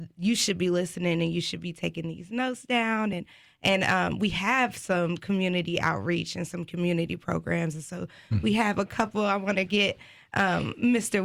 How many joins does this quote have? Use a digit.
0